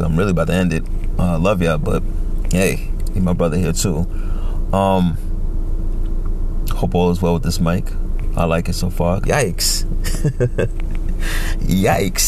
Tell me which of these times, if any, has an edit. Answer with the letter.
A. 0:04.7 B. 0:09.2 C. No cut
B